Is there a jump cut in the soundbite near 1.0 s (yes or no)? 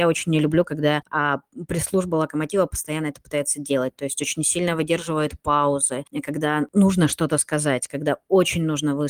yes